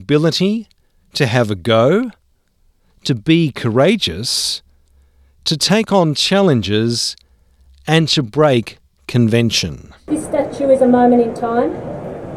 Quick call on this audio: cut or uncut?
uncut